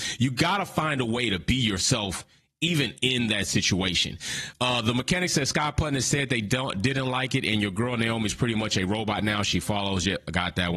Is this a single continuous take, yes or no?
yes